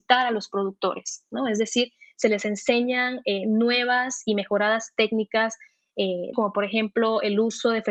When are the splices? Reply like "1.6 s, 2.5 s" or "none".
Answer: 6.3 s